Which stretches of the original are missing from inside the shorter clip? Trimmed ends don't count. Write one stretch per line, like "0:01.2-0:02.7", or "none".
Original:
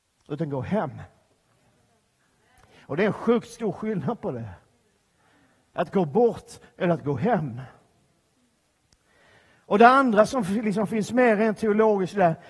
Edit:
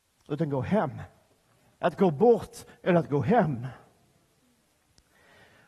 0:01.7-0:05.7